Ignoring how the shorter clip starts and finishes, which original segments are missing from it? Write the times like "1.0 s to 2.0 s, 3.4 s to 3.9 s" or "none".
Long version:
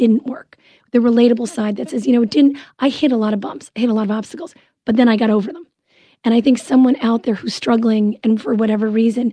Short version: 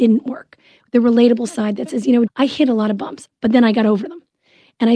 2.3 s to 2.7 s, 3.7 s to 4.7 s